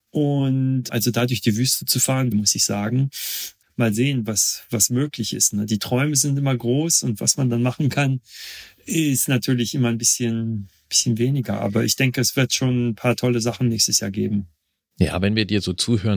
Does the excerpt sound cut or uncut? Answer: cut